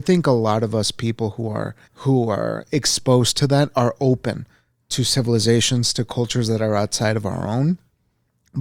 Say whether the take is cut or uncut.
cut